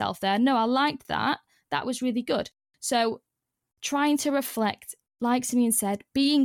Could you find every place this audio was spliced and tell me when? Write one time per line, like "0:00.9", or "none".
none

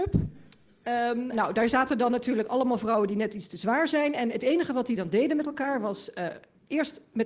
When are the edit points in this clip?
0:01.3

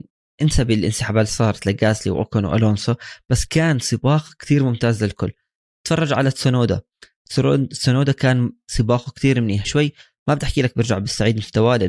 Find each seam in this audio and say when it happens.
0:09.6

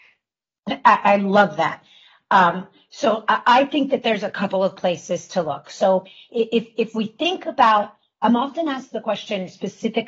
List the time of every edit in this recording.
none

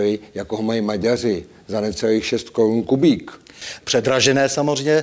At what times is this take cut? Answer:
0:03.8

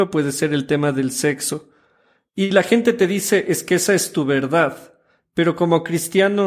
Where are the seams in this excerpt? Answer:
none

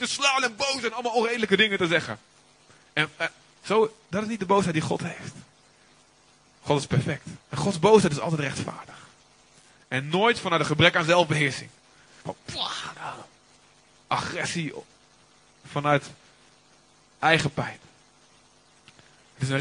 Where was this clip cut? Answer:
0:07.4

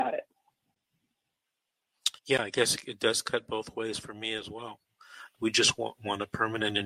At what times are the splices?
0:02.2
0:05.3

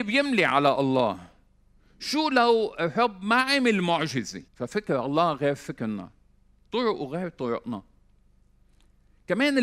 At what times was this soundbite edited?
0:04.5

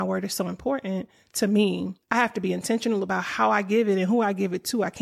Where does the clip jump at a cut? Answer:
0:02.0

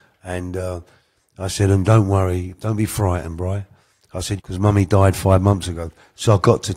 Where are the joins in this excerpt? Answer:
0:04.4

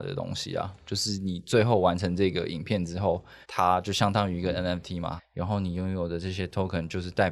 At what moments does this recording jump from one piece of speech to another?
0:03.4
0:05.2

